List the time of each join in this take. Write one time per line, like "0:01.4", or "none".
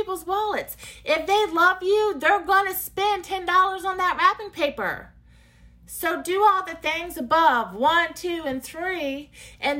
none